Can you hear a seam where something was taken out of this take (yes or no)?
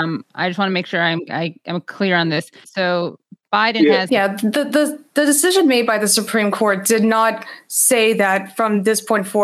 yes